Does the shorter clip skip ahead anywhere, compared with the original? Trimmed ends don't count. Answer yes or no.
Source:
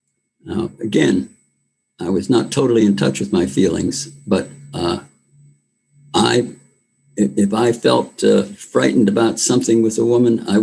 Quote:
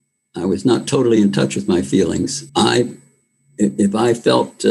yes